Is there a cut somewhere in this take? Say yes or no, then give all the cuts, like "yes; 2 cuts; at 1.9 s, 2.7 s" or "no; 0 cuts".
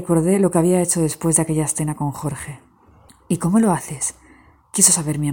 no; 0 cuts